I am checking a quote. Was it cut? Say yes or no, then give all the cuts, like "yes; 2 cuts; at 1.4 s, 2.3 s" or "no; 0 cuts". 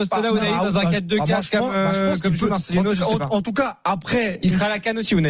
no; 0 cuts